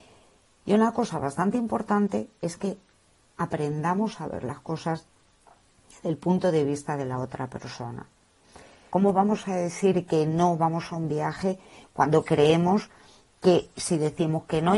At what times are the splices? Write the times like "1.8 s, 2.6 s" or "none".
8.9 s